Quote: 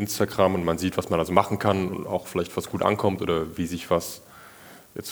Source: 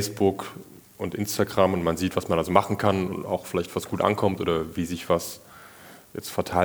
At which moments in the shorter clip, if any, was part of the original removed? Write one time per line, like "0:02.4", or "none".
none